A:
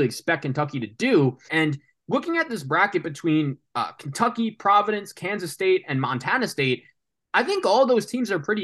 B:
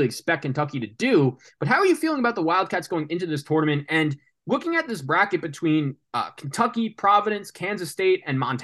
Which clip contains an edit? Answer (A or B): A